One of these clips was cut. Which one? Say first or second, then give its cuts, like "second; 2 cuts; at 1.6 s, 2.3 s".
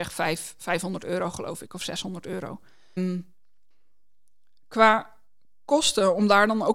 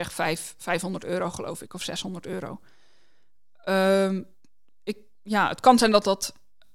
first; 1 cut; at 3.0 s